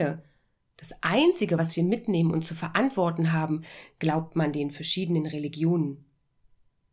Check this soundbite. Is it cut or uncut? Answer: uncut